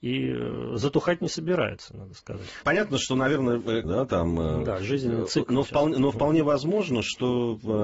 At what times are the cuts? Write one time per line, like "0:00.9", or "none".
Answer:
0:02.6
0:03.8